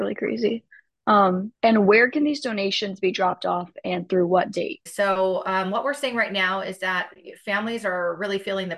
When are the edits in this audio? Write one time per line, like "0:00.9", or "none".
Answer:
0:01.5
0:04.9